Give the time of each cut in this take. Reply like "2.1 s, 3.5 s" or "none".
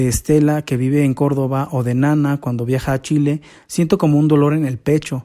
none